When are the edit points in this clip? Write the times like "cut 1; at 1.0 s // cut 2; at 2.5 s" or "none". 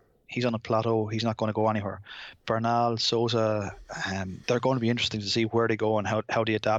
cut 1; at 4.4 s